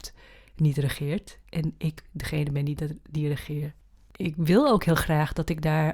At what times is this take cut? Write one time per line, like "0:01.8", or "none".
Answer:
0:04.0